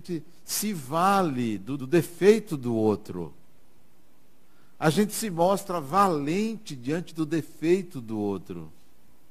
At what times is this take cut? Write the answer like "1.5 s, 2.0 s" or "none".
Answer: 1.8 s